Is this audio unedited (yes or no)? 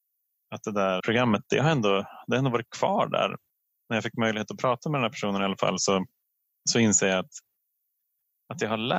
no